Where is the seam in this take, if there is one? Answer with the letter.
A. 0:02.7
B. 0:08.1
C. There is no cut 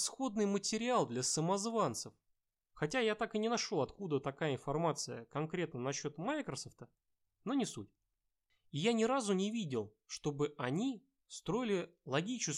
A